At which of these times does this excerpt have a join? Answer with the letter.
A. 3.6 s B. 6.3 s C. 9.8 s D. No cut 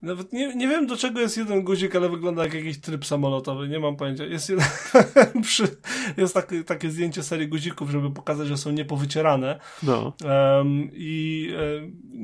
D